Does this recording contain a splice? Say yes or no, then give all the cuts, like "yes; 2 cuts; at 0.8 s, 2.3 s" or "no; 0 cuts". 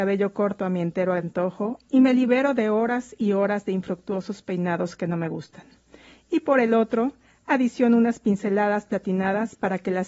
no; 0 cuts